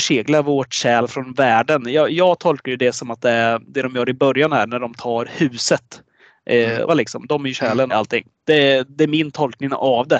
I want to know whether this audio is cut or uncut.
cut